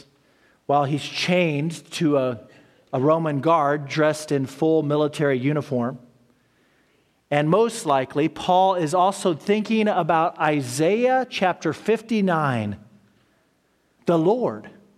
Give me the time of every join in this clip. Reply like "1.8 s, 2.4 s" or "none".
14.0 s